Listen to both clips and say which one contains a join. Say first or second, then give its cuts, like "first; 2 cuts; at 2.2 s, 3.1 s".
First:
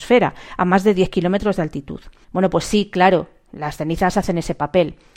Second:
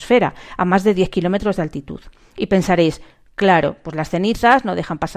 first; 1 cut; at 2.2 s